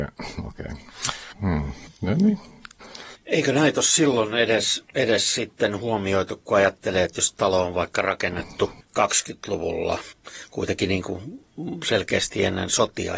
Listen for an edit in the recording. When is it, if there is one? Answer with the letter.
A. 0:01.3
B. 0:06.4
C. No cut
A